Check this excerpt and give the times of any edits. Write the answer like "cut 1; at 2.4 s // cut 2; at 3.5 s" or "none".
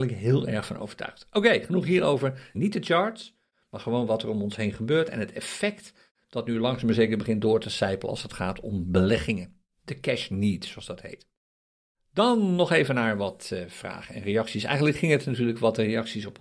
cut 1; at 2.5 s